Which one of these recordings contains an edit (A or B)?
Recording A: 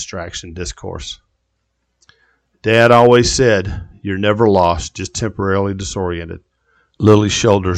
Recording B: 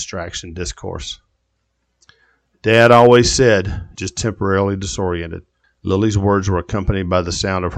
B